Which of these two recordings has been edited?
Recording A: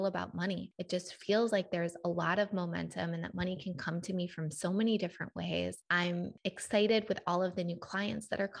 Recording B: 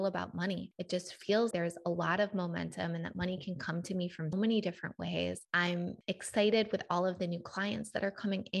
B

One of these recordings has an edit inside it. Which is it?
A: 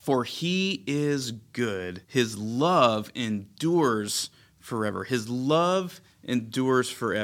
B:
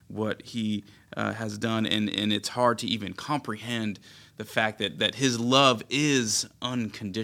A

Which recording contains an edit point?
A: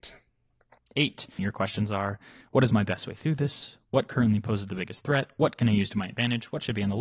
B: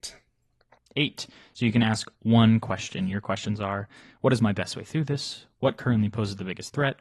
A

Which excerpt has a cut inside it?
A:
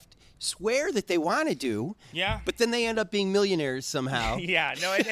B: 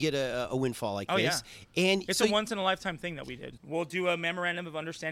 B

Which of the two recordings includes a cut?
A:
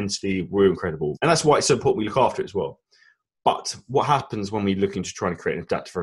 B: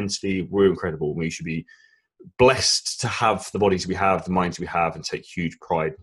A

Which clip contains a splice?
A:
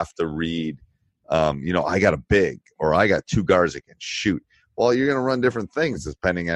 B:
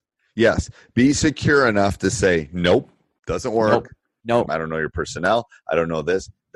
B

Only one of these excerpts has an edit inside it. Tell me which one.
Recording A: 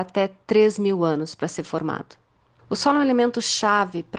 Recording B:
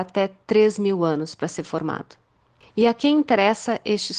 A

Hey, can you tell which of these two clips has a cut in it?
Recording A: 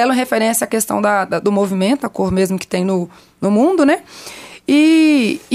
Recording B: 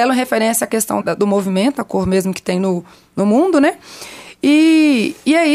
B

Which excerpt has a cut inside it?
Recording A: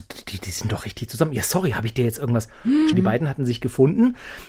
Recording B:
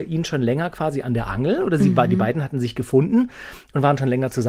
A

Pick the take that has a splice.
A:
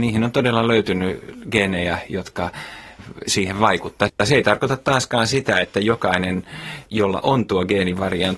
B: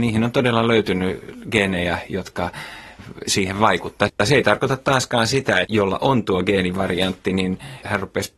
B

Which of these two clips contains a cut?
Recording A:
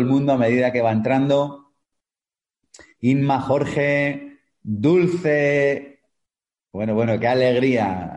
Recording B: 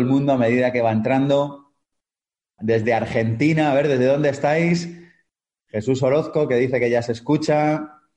B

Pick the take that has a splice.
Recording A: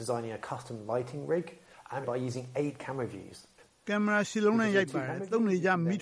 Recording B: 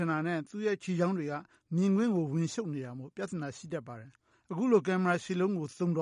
A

